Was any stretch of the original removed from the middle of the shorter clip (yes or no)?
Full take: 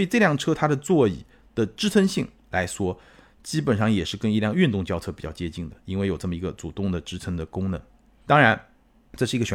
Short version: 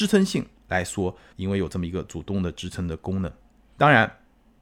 yes